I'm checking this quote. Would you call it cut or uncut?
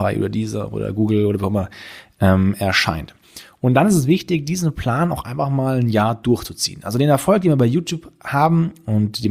uncut